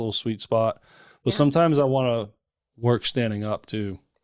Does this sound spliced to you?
no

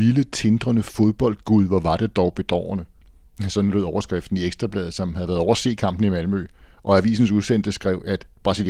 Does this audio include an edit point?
no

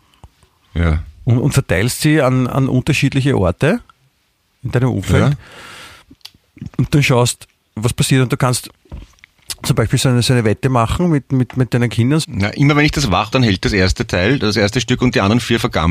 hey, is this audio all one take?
no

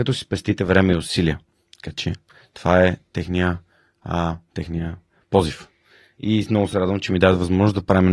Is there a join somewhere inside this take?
no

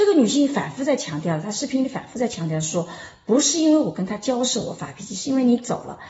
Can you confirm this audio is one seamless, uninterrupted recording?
yes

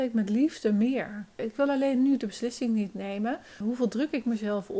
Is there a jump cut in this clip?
yes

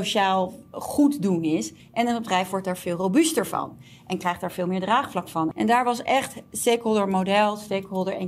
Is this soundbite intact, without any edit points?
no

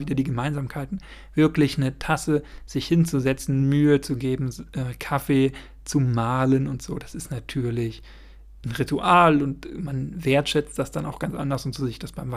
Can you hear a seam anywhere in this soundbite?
no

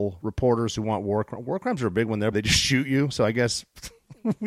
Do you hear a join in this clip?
yes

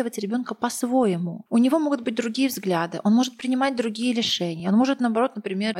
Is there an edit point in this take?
no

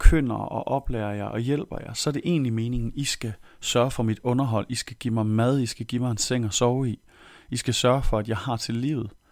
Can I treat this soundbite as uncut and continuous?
yes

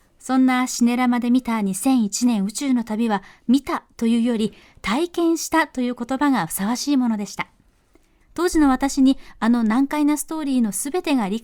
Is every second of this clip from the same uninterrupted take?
no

